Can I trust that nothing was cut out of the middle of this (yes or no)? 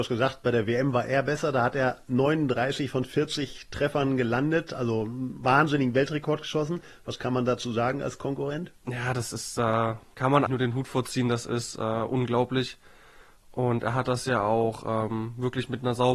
no